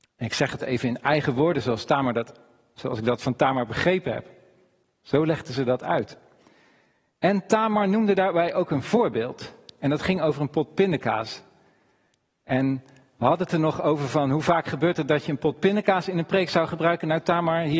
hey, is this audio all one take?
no; 1 cut; at 2.8 s

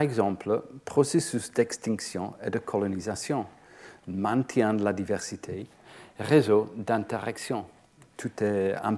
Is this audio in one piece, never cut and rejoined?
yes; 0 cuts

